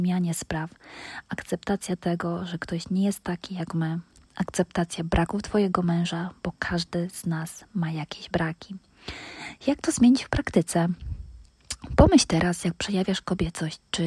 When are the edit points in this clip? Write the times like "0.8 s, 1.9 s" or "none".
none